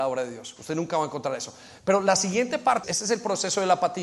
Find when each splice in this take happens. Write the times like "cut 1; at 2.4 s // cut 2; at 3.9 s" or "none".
cut 1; at 2.8 s